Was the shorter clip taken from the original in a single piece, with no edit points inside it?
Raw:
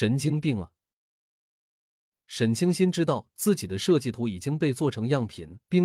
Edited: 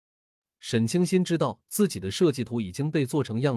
yes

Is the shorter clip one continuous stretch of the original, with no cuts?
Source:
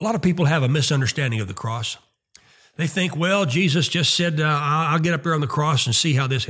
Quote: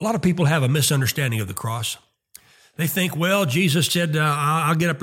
no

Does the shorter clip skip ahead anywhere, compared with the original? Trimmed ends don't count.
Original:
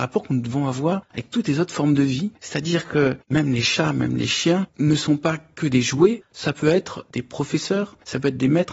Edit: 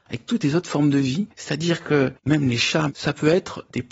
yes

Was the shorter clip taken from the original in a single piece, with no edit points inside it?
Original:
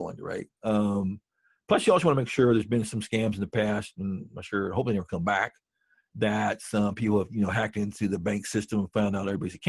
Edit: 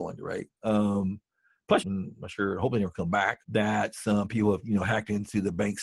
no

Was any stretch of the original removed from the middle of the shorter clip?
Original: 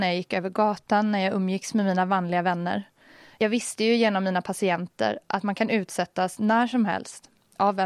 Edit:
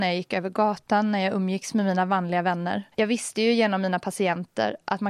yes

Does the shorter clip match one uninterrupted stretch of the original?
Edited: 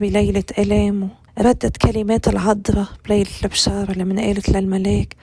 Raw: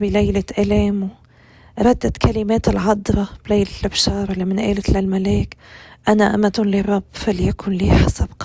no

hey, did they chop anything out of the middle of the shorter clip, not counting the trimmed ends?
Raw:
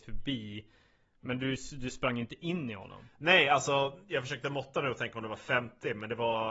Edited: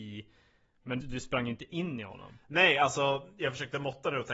yes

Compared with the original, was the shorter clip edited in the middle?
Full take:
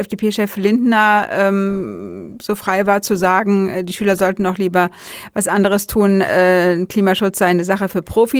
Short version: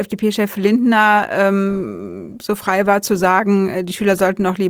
no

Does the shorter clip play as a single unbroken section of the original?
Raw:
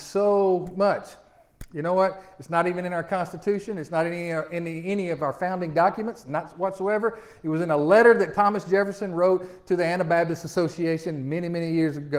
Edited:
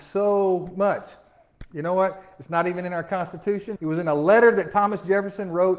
no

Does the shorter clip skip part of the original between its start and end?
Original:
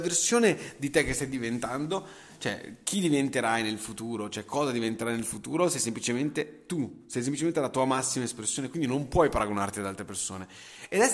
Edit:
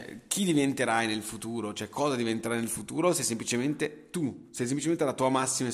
no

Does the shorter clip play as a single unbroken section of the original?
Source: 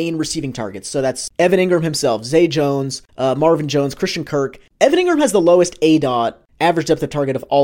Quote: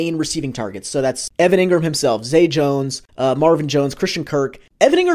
yes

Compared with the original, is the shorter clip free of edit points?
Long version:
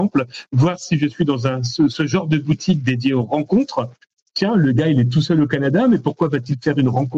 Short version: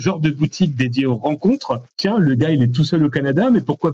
no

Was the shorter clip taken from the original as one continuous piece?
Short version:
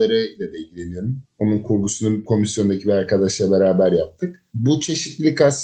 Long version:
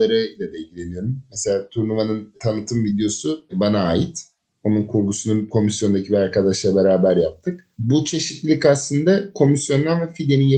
no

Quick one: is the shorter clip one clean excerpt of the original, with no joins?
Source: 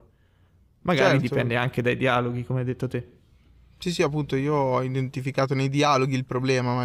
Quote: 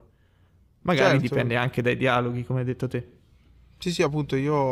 yes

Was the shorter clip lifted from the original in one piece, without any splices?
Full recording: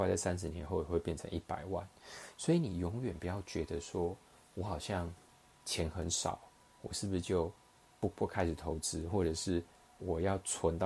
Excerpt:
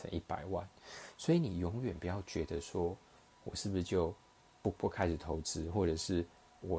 no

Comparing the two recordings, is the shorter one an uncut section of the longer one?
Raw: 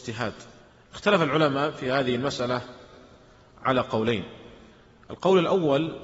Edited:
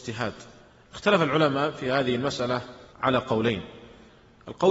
no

